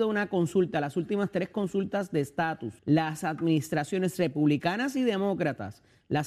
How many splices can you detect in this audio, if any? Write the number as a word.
one